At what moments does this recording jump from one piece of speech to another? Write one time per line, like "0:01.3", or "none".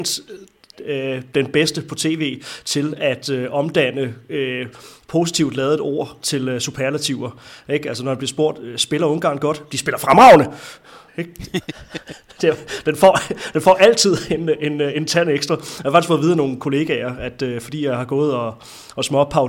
0:11.1